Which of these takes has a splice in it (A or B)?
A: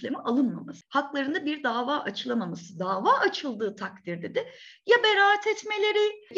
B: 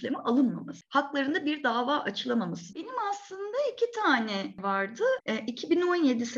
B